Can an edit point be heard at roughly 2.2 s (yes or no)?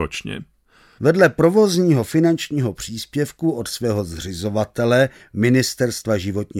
no